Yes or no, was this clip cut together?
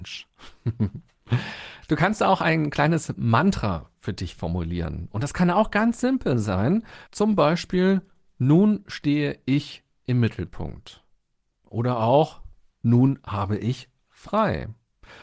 no